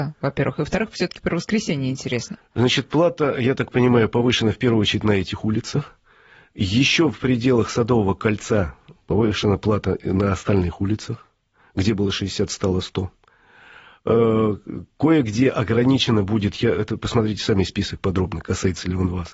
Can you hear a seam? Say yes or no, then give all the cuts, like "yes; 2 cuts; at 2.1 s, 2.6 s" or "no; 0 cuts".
no; 0 cuts